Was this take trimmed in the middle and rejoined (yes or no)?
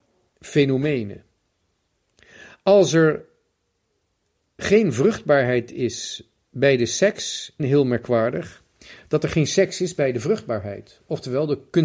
yes